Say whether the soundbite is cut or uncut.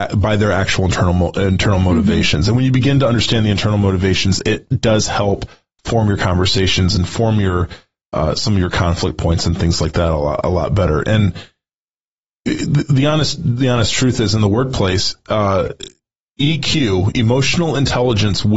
uncut